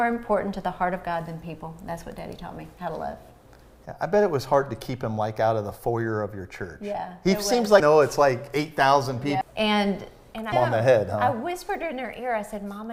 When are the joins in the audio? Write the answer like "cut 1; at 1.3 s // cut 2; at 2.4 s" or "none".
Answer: cut 1; at 7.8 s // cut 2; at 9.4 s // cut 3; at 10.5 s